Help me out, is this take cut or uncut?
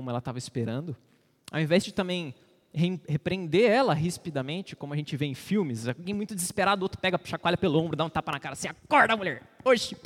uncut